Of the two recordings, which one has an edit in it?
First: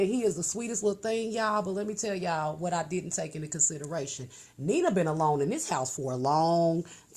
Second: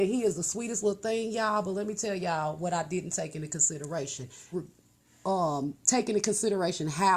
second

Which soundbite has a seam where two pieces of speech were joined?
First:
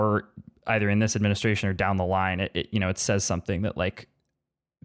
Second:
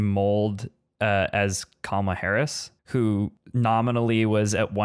second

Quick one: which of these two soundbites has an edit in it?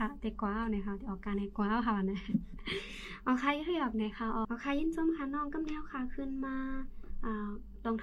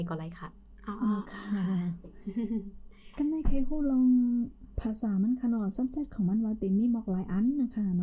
first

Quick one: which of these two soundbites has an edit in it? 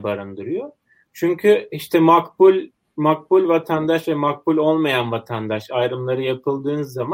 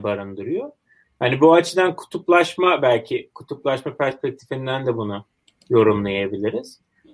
second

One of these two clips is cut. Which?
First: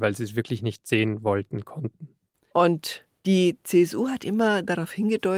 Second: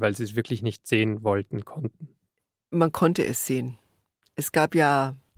first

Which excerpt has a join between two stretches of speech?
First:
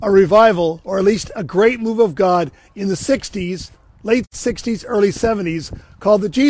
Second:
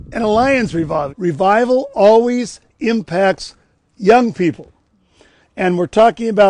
second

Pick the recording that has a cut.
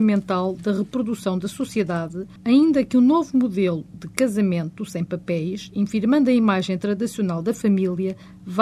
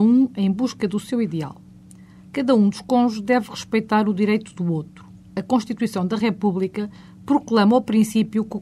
first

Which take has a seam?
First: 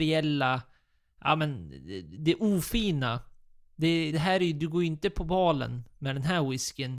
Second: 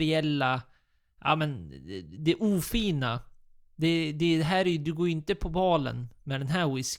first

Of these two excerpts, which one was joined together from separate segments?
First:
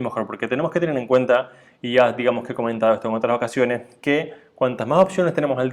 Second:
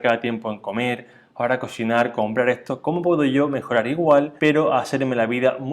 second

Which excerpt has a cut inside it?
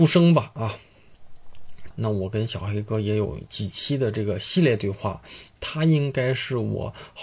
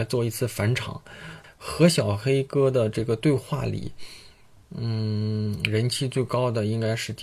first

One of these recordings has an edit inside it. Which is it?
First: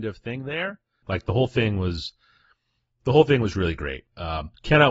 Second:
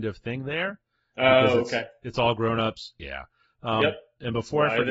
first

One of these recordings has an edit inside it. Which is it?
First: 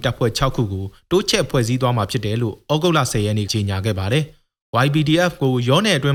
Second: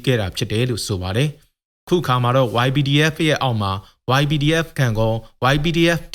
first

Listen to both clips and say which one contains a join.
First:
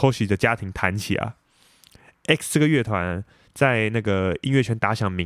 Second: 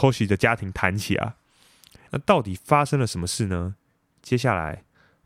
second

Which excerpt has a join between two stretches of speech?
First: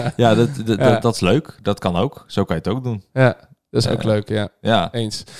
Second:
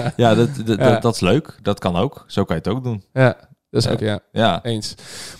second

